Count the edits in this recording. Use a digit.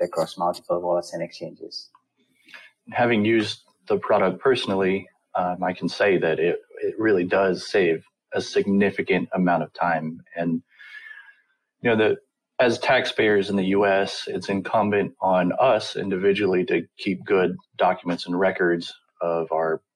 0